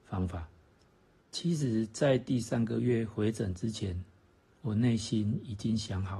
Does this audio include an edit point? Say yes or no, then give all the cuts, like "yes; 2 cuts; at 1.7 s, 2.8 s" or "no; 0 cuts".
yes; 1 cut; at 1.2 s